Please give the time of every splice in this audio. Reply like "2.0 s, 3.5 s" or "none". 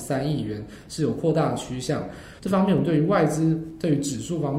2.4 s